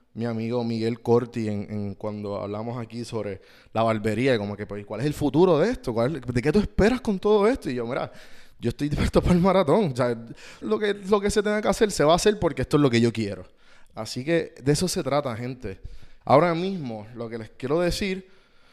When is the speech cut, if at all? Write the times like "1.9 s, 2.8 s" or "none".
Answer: 10.6 s, 13.9 s, 16.2 s